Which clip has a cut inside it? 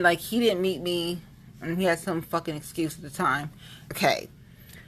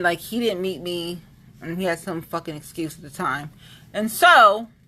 first; 1 cut; at 3.9 s

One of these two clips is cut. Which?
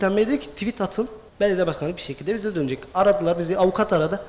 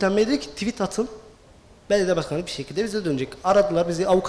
first; 1 cut; at 1.3 s

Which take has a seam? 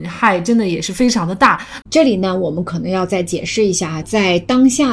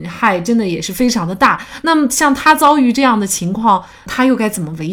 first; 2 cuts; at 1.8 s, 4.0 s

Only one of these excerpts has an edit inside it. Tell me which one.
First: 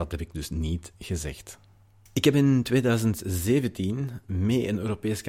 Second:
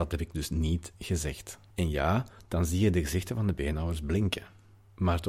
second; 1 cut; at 1.7 s

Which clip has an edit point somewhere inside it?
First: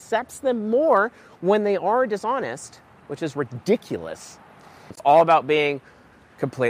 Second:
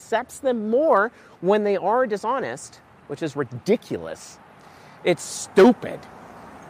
first; 1 cut; at 4.9 s

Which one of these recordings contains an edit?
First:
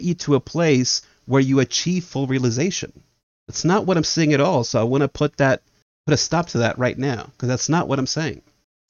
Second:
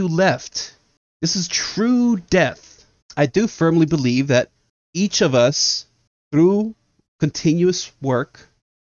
second; 1 cut; at 3.0 s

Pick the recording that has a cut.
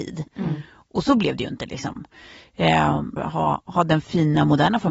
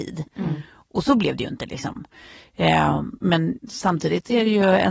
first; 1 cut; at 3.2 s

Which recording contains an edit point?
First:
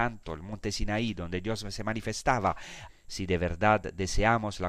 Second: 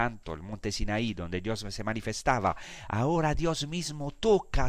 first; 1 cut; at 2.9 s

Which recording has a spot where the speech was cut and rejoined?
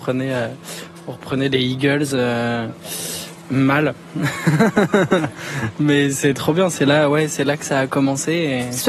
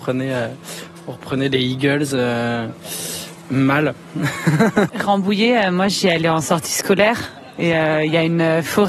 second; 1 cut; at 4.9 s

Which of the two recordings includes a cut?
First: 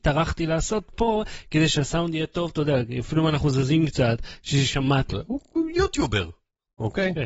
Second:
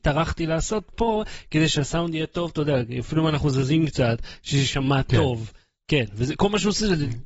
first; 1 cut; at 5.1 s

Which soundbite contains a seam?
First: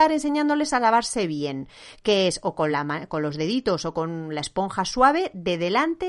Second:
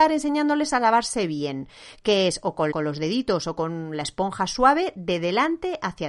second; 1 cut; at 2.7 s

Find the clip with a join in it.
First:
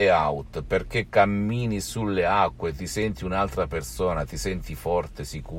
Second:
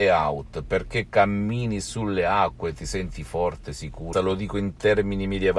second; 2 cuts; at 2.7 s, 4.1 s

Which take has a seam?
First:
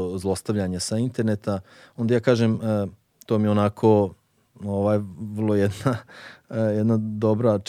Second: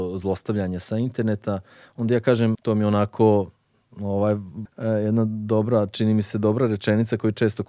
second; 2 cuts; at 2.5 s, 4.7 s

